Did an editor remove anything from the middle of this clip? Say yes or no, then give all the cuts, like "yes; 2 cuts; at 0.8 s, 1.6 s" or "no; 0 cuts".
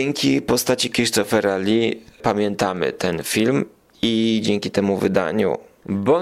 no; 0 cuts